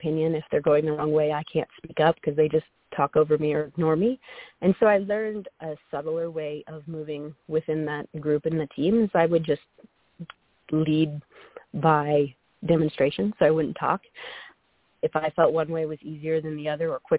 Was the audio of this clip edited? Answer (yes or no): no